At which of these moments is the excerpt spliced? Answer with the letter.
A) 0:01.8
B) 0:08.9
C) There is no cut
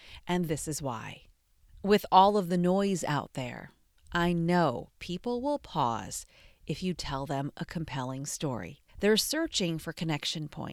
B